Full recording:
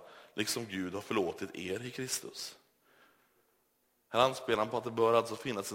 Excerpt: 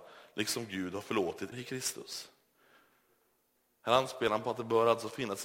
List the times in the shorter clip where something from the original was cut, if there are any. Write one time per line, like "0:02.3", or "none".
0:01.5